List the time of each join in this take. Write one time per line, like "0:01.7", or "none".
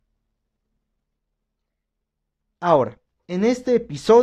none